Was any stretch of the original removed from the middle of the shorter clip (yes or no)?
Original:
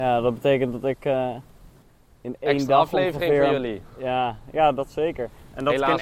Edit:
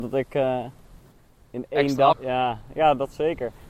yes